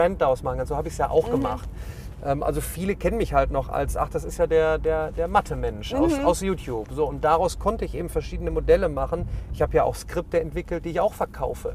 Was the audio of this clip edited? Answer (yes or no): no